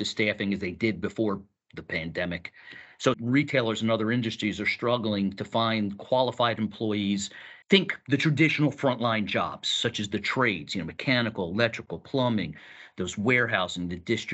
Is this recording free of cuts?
no; 2 cuts; at 3.1 s, 7.6 s

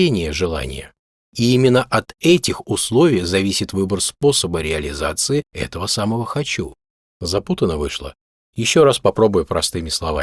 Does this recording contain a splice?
yes; 1 cut; at 1.3 s

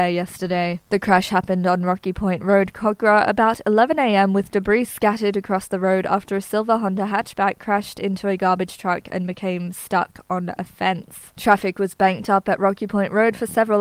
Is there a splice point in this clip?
no; 0 cuts

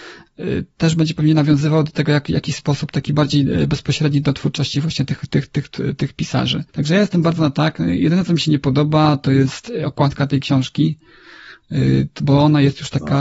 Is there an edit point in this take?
yes; 1 cut; at 6.7 s

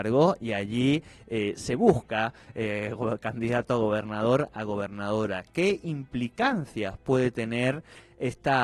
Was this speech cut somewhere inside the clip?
no; 0 cuts

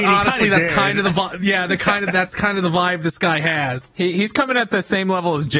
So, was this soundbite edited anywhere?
no; 0 cuts

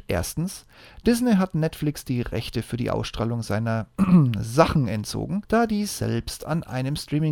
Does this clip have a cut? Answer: no; 0 cuts

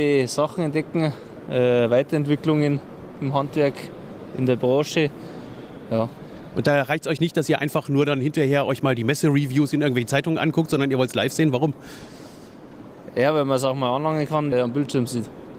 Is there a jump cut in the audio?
yes; 1 cut; at 14.5 s

